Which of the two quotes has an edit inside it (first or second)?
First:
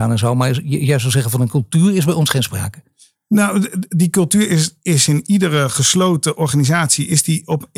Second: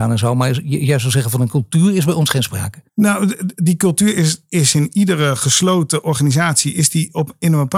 second